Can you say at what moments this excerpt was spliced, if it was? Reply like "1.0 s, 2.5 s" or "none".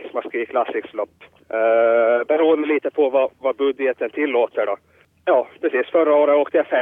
none